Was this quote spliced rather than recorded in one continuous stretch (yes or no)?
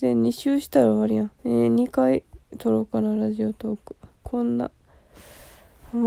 yes